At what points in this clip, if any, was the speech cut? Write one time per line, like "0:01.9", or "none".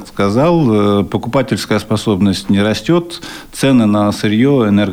none